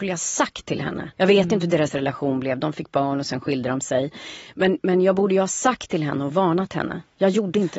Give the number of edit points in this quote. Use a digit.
1